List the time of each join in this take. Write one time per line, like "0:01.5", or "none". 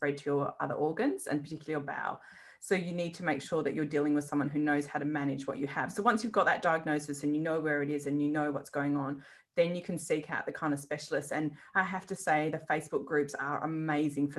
none